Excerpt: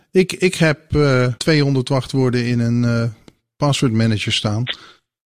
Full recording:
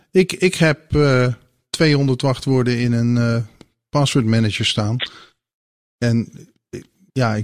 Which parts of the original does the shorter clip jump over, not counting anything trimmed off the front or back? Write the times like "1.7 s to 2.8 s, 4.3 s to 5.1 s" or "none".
1.4 s to 1.7 s